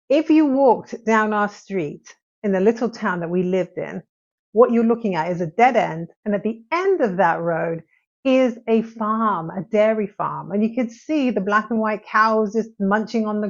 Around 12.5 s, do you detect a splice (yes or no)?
no